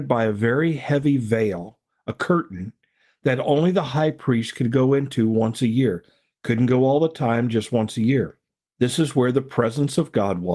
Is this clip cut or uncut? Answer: uncut